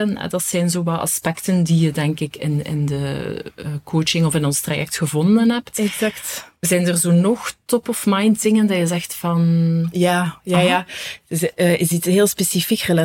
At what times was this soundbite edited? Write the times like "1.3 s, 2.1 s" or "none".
none

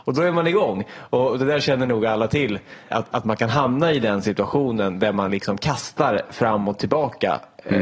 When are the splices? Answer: 2.9 s

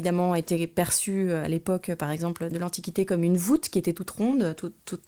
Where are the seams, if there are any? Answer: none

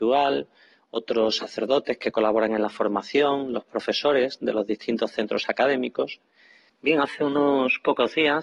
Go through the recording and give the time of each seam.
6.7 s

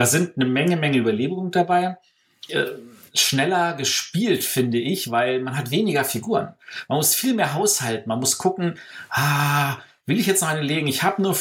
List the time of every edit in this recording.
2.5 s

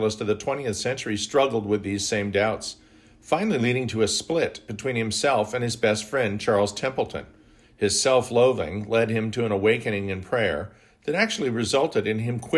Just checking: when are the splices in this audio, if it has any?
7.6 s

